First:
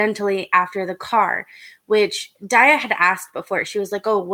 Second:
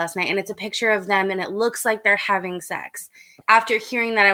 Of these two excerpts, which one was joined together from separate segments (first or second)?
second